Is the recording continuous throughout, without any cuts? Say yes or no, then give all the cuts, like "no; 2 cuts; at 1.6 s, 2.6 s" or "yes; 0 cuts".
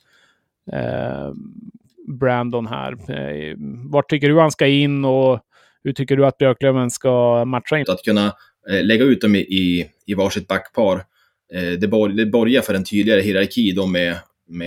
no; 1 cut; at 7.8 s